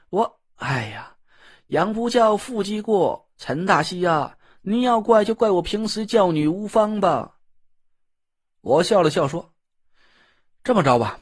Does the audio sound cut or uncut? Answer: uncut